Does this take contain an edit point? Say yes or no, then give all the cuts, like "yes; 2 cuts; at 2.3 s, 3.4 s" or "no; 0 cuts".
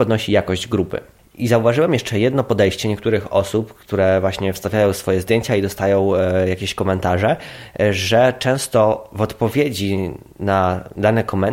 no; 0 cuts